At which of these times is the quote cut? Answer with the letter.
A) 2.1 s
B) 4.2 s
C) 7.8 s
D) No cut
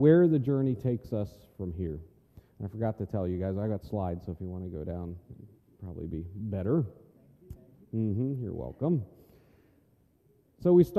D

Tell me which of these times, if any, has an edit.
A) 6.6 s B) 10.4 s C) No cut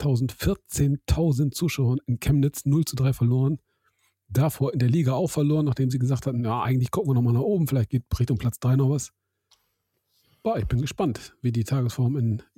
C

